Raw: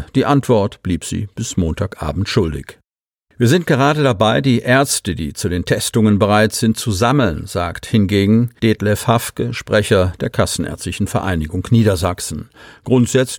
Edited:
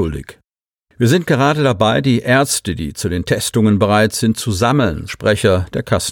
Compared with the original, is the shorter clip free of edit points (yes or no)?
no